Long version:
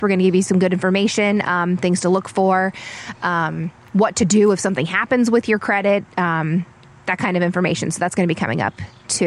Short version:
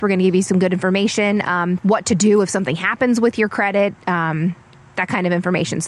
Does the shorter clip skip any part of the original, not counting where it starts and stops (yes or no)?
yes